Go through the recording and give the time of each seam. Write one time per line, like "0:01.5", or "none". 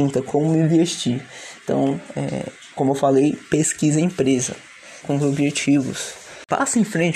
0:02.7
0:05.0